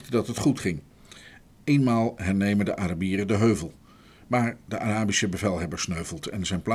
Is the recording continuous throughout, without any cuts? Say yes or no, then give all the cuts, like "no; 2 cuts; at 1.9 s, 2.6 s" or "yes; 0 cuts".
yes; 0 cuts